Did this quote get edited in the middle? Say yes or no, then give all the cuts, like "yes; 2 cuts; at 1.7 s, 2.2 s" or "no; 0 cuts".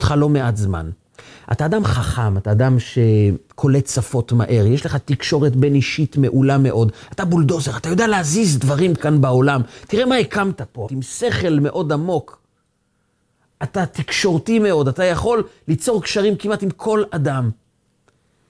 yes; 1 cut; at 10.9 s